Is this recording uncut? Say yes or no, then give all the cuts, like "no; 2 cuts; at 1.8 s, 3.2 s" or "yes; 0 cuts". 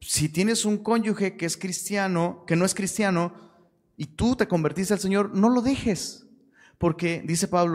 yes; 0 cuts